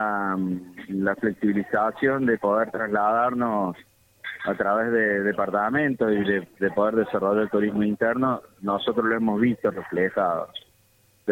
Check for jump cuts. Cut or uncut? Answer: uncut